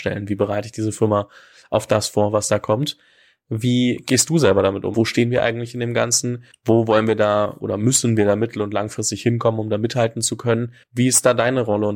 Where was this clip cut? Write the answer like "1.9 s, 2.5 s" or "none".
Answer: 4.9 s